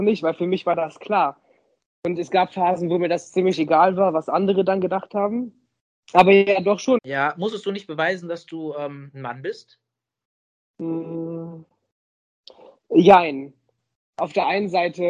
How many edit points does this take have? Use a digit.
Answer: 1